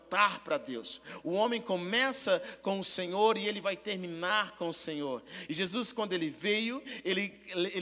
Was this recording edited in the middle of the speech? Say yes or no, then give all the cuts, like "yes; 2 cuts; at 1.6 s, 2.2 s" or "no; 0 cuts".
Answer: no; 0 cuts